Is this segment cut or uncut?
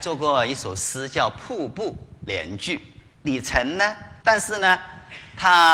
cut